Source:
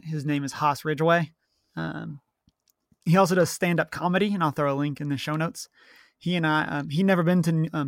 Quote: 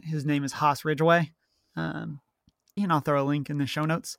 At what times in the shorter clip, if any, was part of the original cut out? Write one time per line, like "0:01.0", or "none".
0:02.8